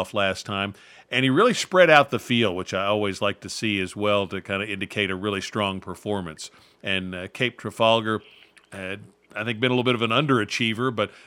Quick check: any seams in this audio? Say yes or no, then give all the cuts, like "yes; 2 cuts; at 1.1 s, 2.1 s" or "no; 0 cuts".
yes; 1 cut; at 6.8 s